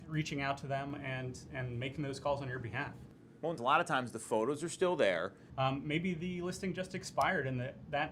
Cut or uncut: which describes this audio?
cut